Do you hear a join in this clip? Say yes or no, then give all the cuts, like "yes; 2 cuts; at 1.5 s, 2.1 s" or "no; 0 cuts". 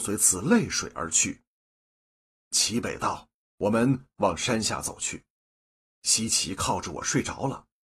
yes; 2 cuts; at 3.4 s, 5.9 s